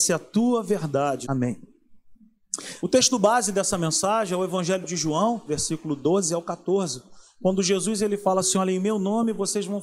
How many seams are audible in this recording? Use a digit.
3